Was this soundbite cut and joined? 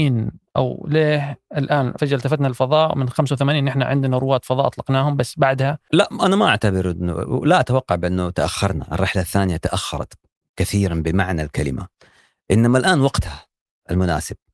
yes; 1 cut; at 2.0 s

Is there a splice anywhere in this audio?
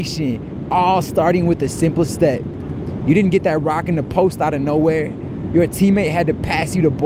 yes; 1 cut; at 3.0 s

